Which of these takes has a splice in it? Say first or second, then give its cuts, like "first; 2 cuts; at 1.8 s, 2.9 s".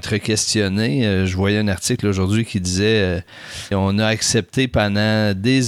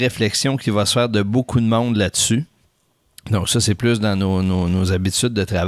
first; 1 cut; at 3.7 s